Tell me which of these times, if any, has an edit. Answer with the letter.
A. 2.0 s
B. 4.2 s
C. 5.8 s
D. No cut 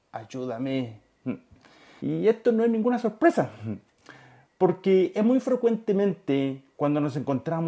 A